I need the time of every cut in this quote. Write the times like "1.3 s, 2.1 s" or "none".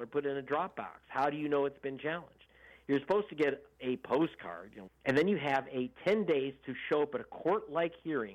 4.9 s, 5.9 s